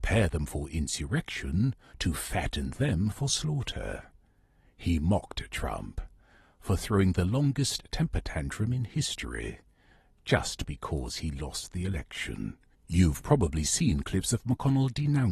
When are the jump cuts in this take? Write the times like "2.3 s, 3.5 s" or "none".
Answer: 1.9 s, 12.7 s